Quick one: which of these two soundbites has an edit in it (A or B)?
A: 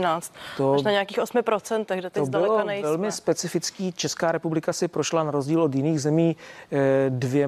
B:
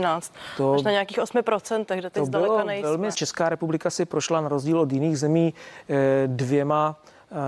B